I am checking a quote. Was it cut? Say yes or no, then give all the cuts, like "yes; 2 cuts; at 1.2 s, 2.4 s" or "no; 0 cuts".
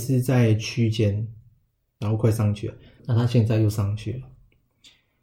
yes; 1 cut; at 3.0 s